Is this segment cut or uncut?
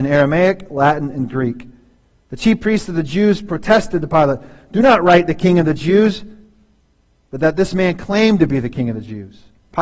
uncut